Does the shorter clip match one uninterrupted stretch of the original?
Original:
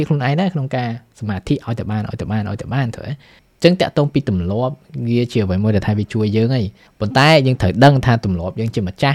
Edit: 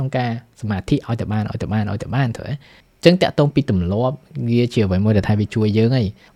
yes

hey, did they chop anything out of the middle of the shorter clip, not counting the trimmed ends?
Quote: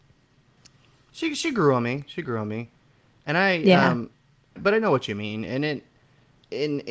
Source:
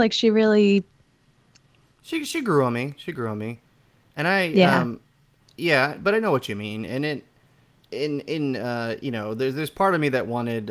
yes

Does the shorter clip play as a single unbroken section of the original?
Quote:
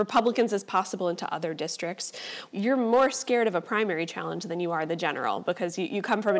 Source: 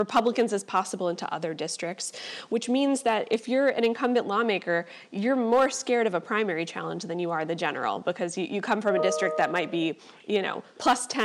no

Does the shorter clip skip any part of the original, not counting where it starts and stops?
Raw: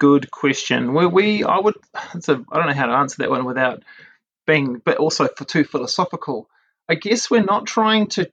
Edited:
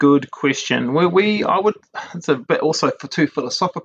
yes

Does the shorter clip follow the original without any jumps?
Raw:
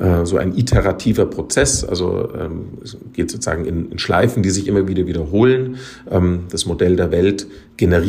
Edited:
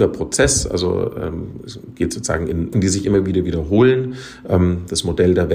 no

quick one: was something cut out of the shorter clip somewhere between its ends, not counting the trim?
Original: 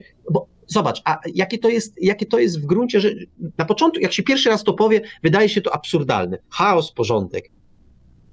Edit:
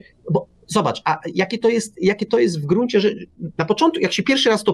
no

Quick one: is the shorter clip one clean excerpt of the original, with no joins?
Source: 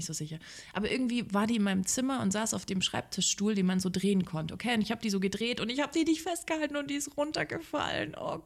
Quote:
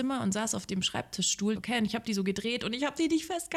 no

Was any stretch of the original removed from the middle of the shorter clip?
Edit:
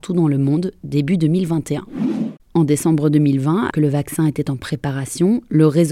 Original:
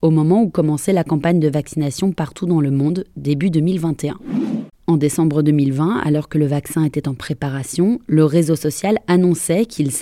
yes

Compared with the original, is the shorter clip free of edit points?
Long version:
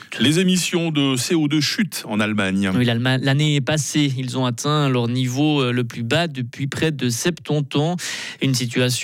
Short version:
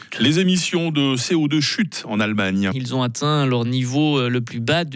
no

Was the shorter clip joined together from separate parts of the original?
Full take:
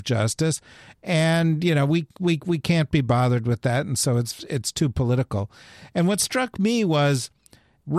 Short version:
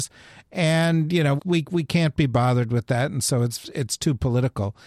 yes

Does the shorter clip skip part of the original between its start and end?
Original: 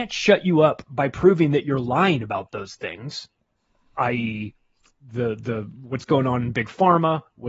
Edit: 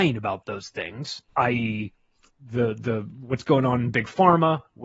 yes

